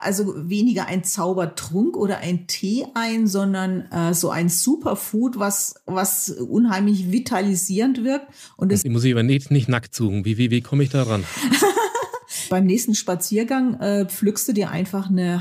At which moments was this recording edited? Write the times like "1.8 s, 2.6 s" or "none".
8.8 s